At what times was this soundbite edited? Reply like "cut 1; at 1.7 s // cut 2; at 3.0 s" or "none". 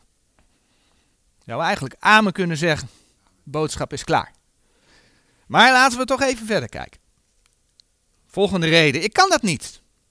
none